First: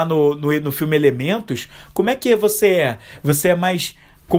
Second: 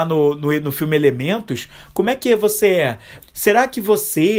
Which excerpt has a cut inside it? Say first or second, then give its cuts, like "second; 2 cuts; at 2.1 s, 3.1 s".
second; 1 cut; at 3.2 s